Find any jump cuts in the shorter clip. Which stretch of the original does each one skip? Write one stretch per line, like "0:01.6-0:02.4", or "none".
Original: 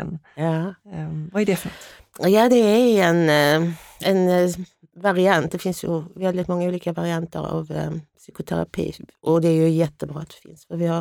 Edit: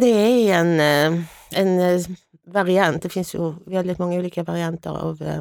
none